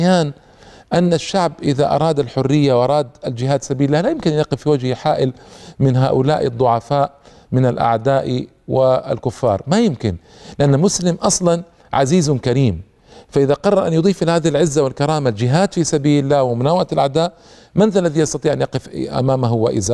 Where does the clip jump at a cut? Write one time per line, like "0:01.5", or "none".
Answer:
none